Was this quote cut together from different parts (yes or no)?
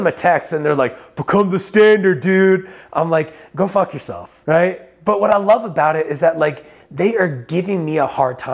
no